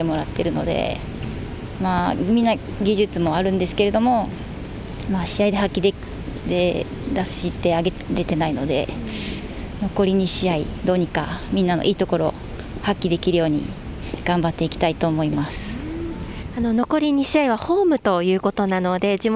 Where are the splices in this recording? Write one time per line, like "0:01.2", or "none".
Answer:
none

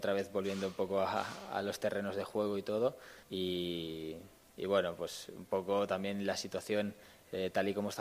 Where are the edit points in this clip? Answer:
0:03.2

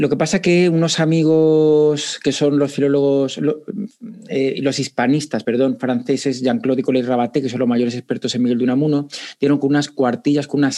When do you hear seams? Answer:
none

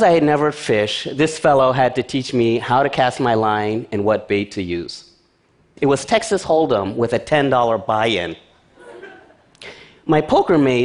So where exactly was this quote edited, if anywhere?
0:05.8

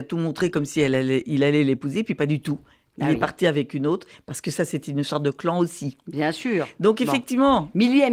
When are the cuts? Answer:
none

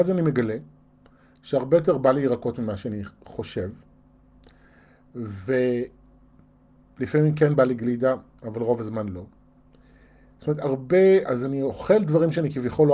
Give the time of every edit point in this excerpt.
0:11.3

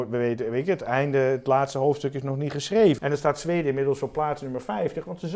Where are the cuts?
0:03.0

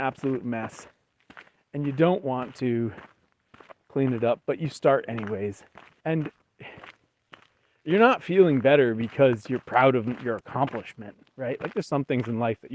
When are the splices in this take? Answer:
0:06.0

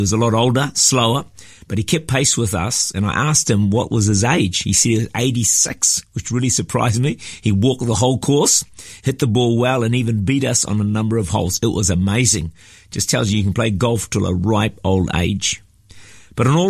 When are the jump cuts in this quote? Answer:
none

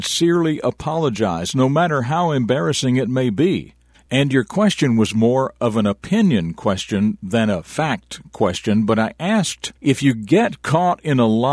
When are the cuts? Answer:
0:03.9
0:09.8

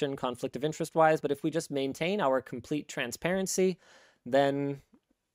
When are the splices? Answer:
none

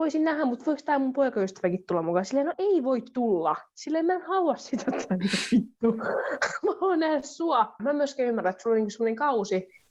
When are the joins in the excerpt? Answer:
0:02.5
0:07.8

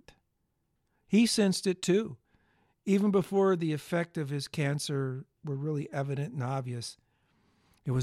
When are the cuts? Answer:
none

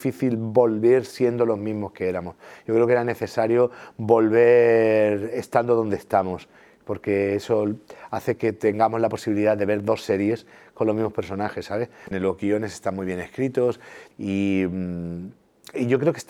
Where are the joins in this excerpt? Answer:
0:12.1
0:14.1

